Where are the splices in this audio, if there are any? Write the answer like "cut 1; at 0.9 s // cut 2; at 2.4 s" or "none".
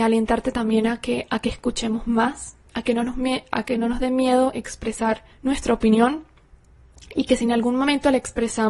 cut 1; at 2.7 s // cut 2; at 5.3 s